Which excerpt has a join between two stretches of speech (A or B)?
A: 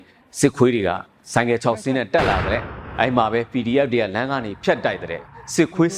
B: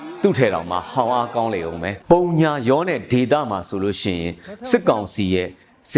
B